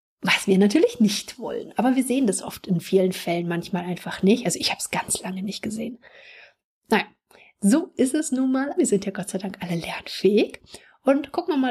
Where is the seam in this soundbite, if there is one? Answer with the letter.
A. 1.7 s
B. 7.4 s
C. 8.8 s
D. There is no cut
C